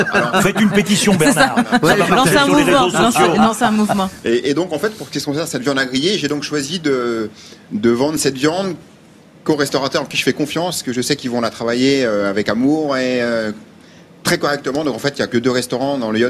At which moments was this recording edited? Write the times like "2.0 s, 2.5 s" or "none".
none